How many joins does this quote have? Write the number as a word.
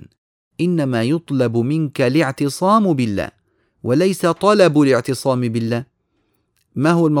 zero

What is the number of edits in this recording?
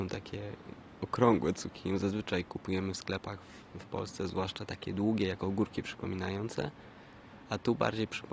zero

